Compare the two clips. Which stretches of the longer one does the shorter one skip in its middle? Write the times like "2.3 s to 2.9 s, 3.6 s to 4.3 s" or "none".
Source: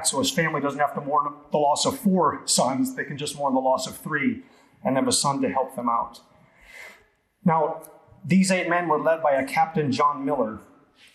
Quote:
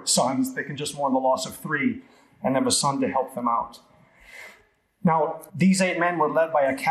7.9 s to 8.2 s